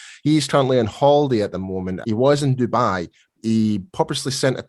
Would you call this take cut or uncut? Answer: cut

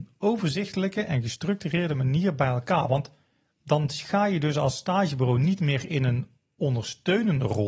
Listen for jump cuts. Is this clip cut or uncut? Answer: uncut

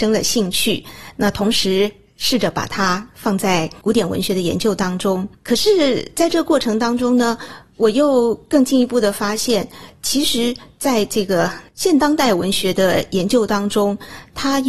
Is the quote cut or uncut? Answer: uncut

